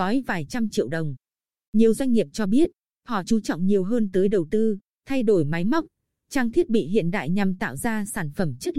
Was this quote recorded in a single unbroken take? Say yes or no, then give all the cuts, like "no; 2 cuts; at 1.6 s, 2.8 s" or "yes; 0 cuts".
yes; 0 cuts